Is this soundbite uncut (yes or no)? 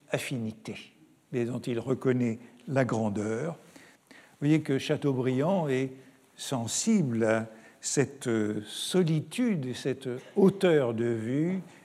no